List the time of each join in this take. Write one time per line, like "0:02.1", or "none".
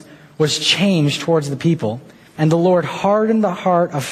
0:02.4